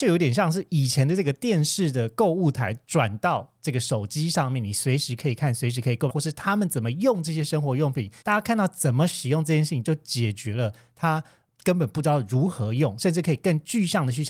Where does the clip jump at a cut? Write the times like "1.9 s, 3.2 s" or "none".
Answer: 6.1 s, 8.2 s